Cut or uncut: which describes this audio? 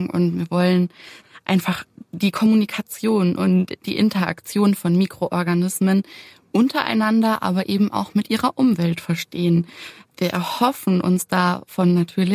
uncut